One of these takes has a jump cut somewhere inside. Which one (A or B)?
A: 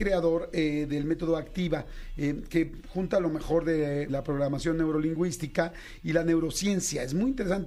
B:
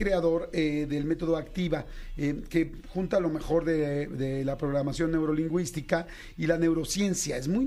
A